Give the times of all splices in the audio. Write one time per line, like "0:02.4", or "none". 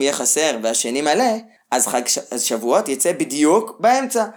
none